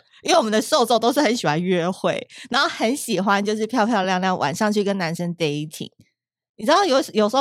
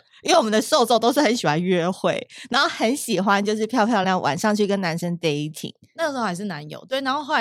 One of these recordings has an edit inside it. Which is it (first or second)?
second